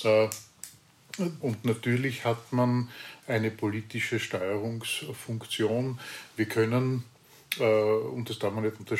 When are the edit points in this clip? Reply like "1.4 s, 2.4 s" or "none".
1.4 s